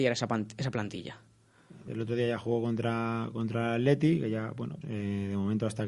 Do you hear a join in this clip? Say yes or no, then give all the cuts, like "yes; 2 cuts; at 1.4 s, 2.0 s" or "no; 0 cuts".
yes; 2 cuts; at 1.9 s, 4.8 s